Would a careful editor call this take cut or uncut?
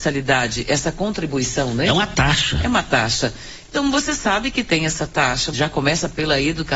cut